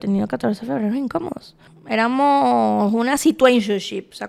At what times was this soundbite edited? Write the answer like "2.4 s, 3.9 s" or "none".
1.7 s